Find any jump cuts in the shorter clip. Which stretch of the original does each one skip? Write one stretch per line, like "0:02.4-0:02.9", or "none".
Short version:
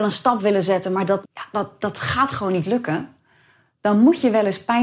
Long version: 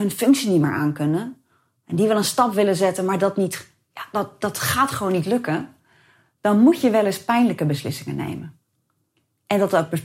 0:03.3-0:03.8